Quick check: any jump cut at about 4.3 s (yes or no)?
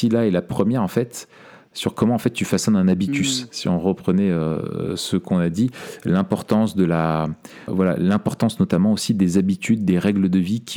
no